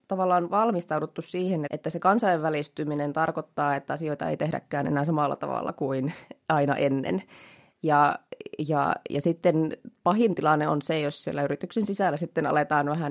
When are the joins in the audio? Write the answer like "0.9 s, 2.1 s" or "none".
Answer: 1.7 s